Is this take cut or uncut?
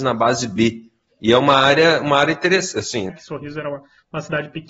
cut